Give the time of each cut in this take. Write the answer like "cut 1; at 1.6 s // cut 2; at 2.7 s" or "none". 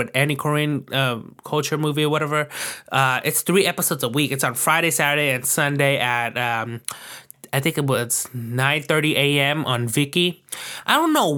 none